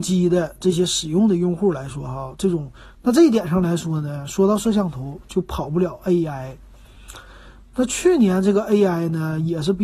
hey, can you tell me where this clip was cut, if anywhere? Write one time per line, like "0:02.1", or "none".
0:02.9